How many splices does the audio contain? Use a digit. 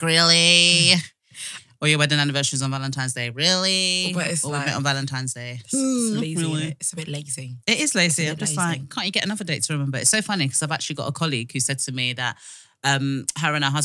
0